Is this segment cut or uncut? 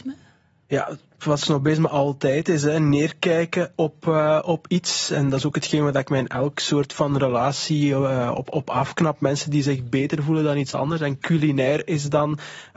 uncut